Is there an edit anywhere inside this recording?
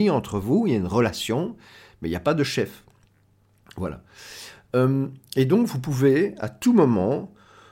no; 0 cuts

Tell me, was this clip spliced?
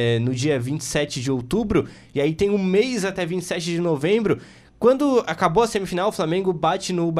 no; 0 cuts

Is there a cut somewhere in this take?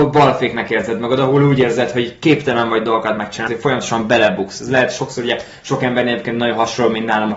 yes; 1 cut; at 3.5 s

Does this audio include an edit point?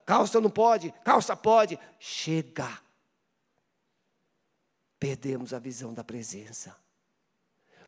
no; 0 cuts

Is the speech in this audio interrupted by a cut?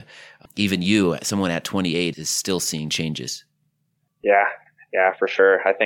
yes; 1 cut; at 2.1 s

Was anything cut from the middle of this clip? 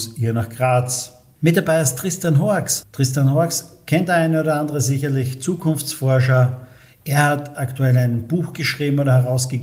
no; 0 cuts

